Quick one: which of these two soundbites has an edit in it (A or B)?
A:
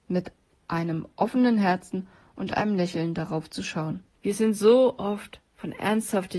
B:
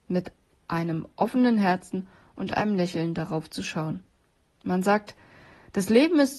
A